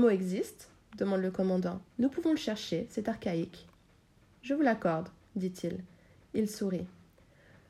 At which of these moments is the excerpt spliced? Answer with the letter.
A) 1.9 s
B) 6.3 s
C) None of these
A